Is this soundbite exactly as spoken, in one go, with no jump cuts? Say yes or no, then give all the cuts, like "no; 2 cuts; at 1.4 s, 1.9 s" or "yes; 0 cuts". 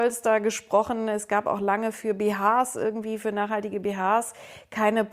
yes; 0 cuts